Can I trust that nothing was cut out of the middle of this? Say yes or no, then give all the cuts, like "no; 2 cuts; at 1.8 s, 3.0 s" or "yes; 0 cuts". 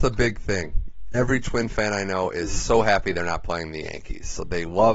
yes; 0 cuts